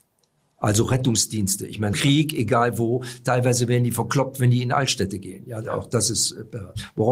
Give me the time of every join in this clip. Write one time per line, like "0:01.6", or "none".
0:01.9